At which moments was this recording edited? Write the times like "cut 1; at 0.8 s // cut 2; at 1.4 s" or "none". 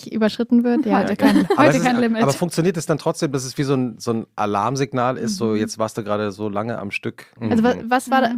cut 1; at 7.4 s

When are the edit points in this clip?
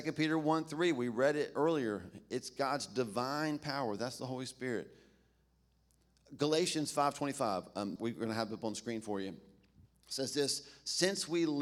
cut 1; at 8.0 s

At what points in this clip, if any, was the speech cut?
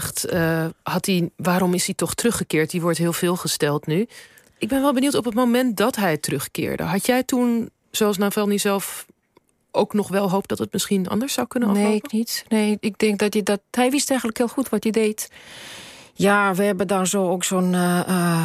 none

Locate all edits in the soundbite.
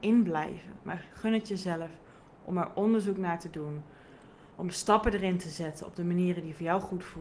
none

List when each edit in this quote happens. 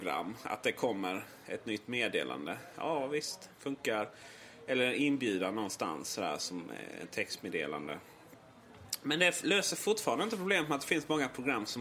none

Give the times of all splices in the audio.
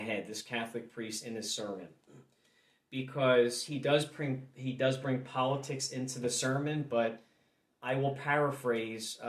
none

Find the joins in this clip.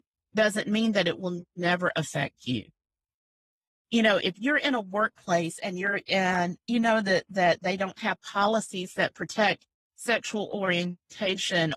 cut 1; at 3.7 s

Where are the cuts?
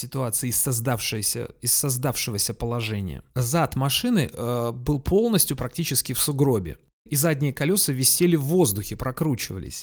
cut 1; at 3.3 s

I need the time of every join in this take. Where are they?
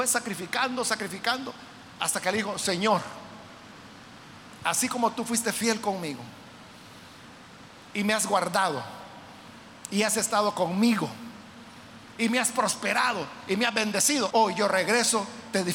cut 1; at 14.3 s

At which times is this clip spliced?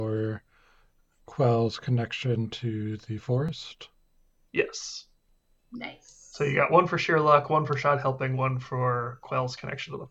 none

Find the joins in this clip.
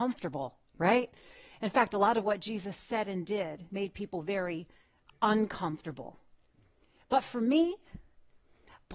none

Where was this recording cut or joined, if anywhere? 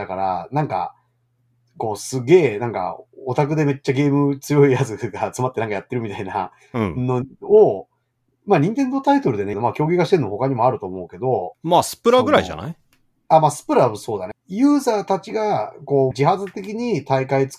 cut 1; at 9.5 s // cut 2; at 14.3 s // cut 3; at 16.1 s

